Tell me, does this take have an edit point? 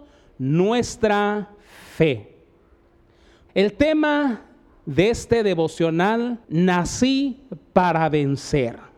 yes; 2 cuts; at 3.5 s, 6.4 s

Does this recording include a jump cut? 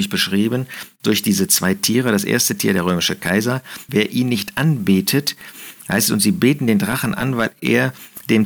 yes; 1 cut; at 3.9 s

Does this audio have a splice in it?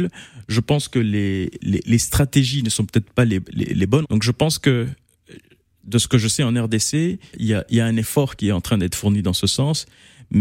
yes; 2 cuts; at 4.0 s, 7.3 s

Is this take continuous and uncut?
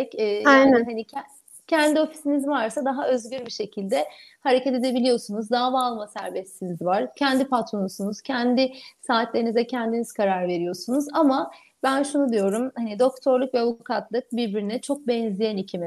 yes; 0 cuts

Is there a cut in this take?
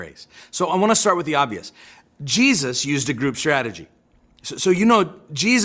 no; 0 cuts

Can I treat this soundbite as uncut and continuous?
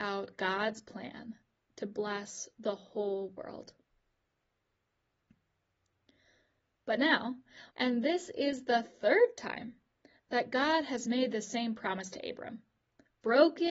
no; 1 cut; at 7.7 s

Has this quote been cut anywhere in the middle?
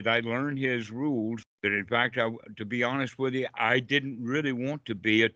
yes; 1 cut; at 1.4 s

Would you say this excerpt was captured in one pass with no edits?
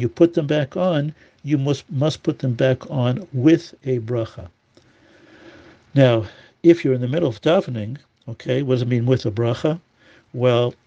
yes; 0 cuts

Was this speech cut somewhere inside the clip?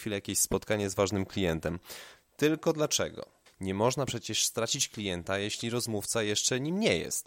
yes; 2 cuts; at 2.2 s, 3.5 s

